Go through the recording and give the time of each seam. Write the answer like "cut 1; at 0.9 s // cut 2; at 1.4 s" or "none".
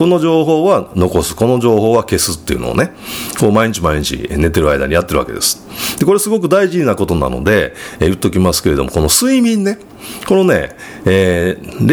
none